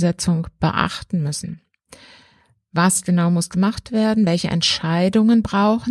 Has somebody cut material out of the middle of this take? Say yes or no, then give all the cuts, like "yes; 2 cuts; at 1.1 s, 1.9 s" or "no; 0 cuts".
no; 0 cuts